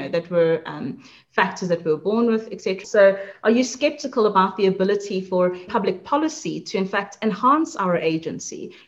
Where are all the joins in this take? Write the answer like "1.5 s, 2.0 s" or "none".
2.8 s, 5.7 s